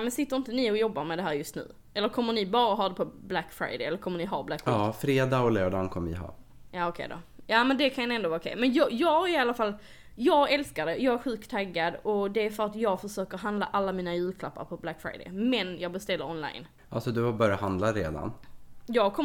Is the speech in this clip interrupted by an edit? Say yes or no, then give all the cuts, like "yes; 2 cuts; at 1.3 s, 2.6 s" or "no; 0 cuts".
no; 0 cuts